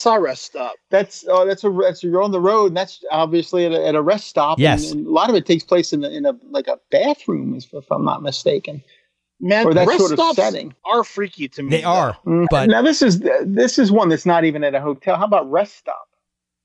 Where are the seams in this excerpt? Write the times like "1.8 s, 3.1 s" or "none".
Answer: 10.8 s, 12.5 s